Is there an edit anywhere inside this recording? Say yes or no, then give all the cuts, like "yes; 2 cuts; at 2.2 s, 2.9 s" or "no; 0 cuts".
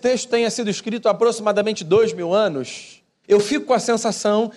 yes; 1 cut; at 3.2 s